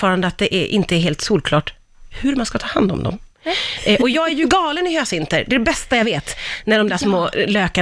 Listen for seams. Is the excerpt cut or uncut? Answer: cut